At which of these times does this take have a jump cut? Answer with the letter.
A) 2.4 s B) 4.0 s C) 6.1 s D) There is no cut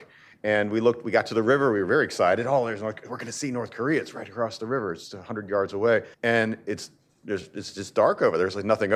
C